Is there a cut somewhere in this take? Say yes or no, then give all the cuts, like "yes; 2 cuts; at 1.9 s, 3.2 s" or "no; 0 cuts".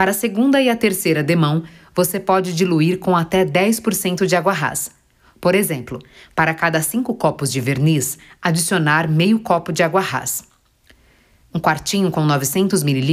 yes; 1 cut; at 11.4 s